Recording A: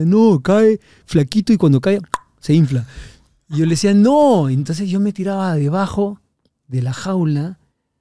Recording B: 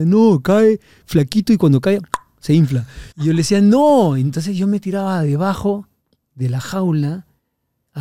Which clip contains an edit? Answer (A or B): B